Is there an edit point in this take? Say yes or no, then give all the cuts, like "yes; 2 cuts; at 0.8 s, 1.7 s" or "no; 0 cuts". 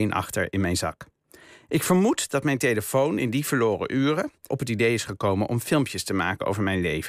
yes; 1 cut; at 4.5 s